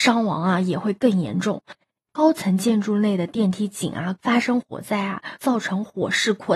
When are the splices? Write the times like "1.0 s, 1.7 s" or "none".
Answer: 2.1 s, 4.2 s, 5.4 s